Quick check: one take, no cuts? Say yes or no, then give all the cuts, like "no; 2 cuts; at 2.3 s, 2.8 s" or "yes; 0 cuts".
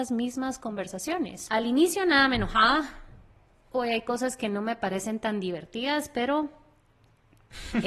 no; 1 cut; at 1.5 s